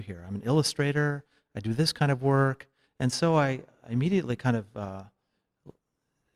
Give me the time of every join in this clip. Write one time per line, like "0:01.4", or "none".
0:02.8